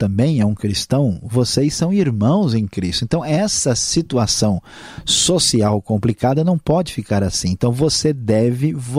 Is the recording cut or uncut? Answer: uncut